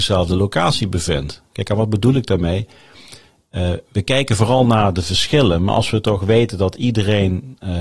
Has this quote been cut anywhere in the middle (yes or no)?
no